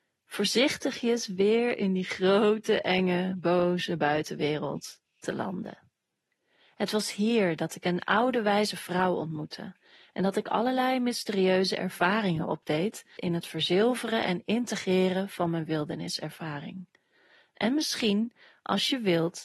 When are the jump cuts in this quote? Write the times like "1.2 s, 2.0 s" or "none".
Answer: 13.2 s